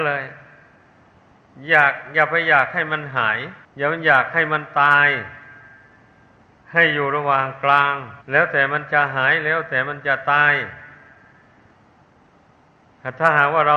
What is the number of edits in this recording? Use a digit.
2